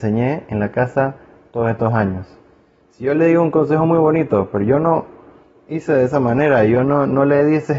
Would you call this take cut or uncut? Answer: uncut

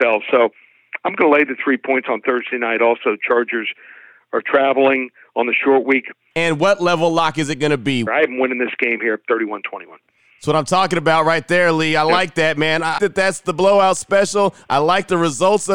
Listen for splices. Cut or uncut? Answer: cut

